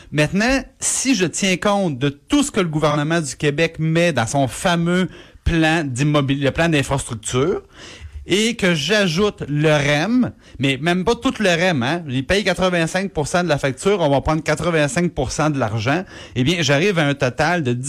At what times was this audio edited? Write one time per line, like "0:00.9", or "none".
none